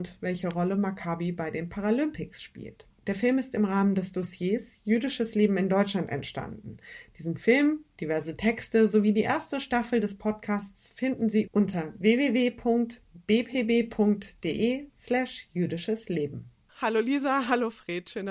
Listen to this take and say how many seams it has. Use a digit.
1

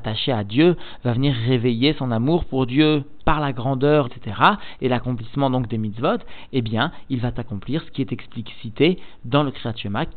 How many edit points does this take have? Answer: 1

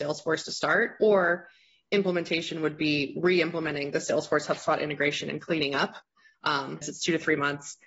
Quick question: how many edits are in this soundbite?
1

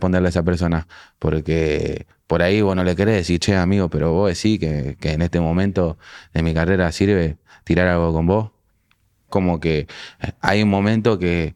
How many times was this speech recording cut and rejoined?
1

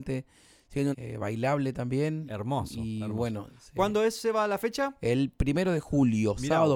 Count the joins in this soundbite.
1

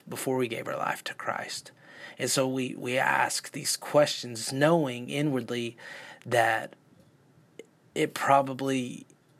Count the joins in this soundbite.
0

